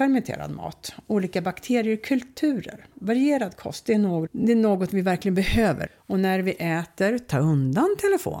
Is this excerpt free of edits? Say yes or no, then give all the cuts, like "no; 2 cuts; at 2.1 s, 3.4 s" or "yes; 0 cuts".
no; 2 cuts; at 4.3 s, 5.9 s